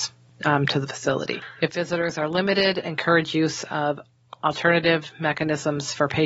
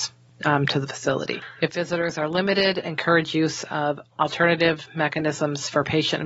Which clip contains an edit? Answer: second; 1 cut; at 4.1 s

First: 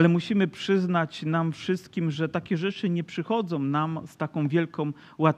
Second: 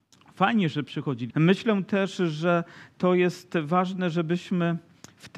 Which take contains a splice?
second; 1 cut; at 1.3 s

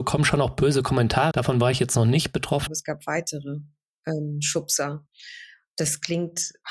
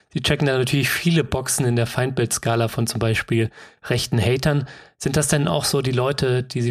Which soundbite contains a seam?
first; 2 cuts; at 1.3 s, 2.7 s

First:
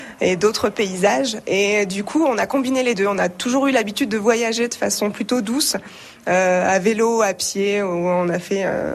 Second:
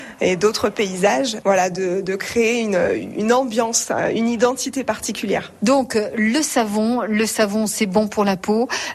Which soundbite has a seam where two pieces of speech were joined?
second; 1 cut; at 1.4 s

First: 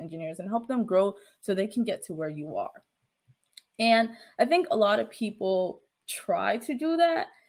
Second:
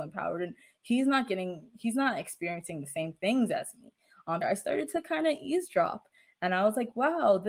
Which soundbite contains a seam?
second; 1 cut; at 4.4 s

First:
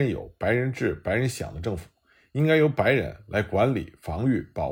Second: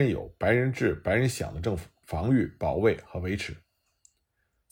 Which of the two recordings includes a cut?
second; 1 cut; at 2.0 s

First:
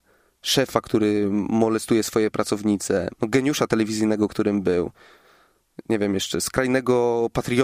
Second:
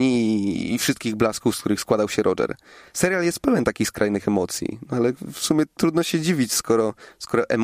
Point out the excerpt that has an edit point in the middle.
first; 1 cut; at 3.1 s

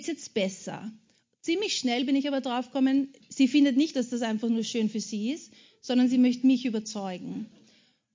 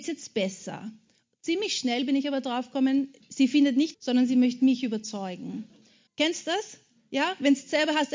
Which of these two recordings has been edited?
second; 2 cuts; at 3.9 s, 6.1 s

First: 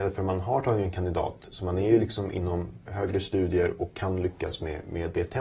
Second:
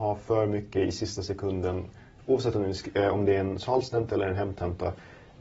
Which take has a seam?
first; 1 cut; at 2.9 s

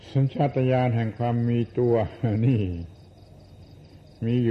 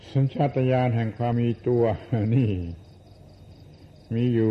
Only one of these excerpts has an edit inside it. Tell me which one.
second; 1 cut; at 1.3 s

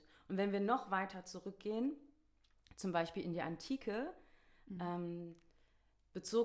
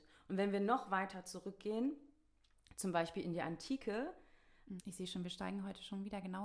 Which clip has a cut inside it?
second; 1 cut; at 4.8 s

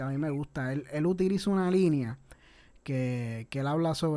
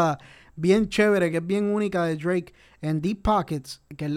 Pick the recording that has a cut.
second; 1 cut; at 1.3 s

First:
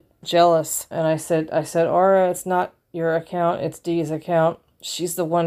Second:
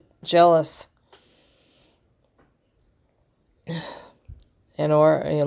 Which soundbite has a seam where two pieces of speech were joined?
first; 1 cut; at 0.9 s

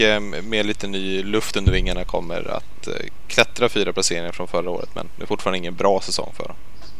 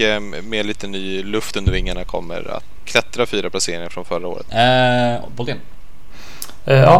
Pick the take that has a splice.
second; 2 cuts; at 2.8 s, 4.5 s

